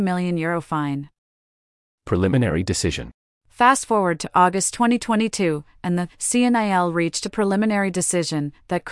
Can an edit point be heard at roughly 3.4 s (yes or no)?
no